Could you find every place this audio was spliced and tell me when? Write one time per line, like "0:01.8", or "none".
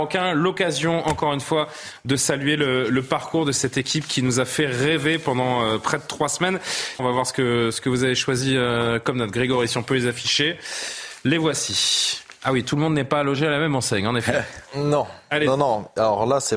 0:07.0